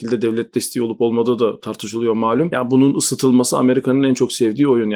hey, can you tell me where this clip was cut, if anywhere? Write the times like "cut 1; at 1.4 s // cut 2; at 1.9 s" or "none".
none